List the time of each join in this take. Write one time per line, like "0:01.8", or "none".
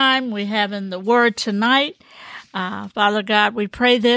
none